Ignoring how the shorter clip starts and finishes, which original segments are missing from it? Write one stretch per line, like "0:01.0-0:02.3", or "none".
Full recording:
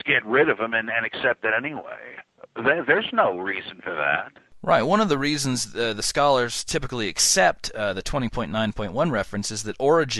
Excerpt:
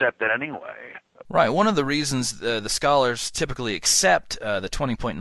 0:02.5-0:04.6